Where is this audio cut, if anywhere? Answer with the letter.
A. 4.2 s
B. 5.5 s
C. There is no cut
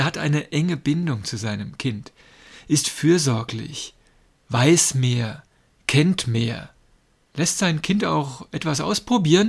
C